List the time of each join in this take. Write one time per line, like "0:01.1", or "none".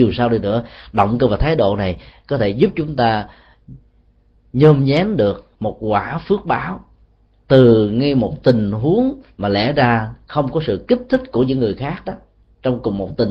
0:05.6

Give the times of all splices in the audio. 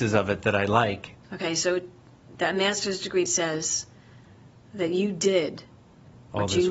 0:01.2
0:03.3

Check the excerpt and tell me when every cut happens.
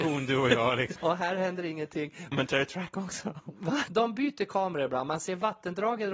0:01.0
0:02.3
0:03.9

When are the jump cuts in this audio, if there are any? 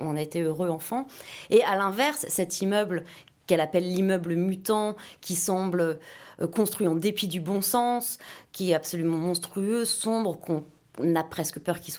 none

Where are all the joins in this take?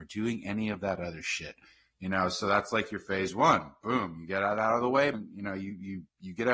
0:05.1

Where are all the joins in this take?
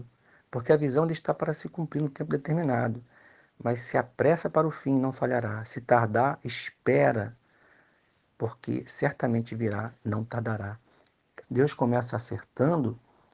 0:11.4

